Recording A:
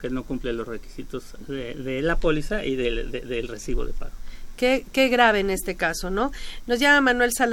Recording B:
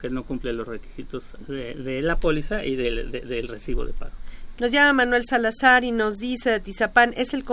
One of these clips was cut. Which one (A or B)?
B